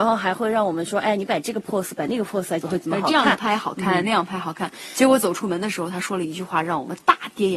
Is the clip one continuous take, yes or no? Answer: no